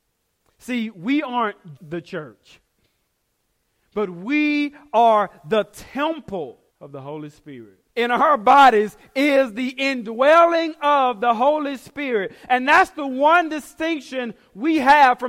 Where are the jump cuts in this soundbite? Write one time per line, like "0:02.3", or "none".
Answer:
0:01.8
0:06.7
0:07.9

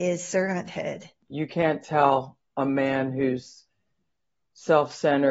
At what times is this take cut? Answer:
0:01.2

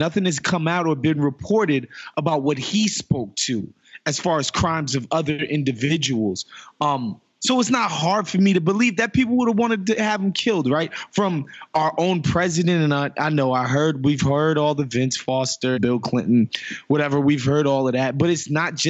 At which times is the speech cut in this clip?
0:15.7

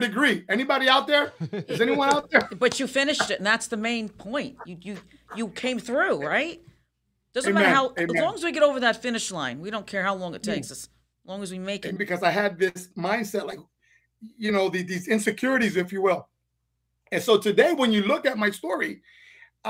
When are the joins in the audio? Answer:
0:12.0

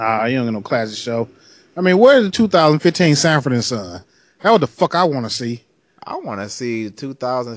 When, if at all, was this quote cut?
none

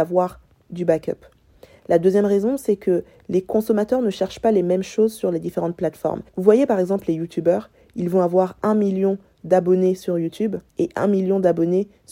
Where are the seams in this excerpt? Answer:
0:06.3
0:10.7

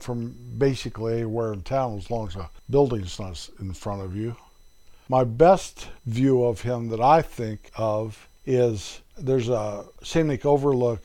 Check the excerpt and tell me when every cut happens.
none

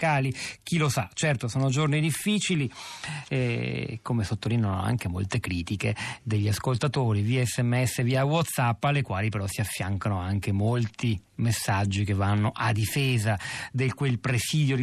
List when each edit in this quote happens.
none

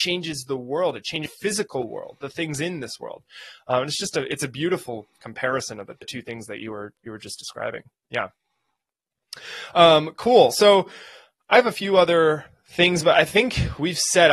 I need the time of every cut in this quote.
none

